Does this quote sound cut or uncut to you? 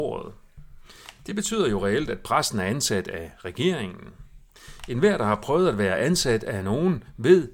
uncut